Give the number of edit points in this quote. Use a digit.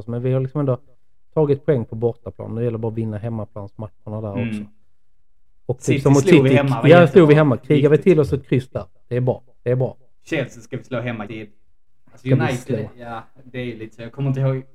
1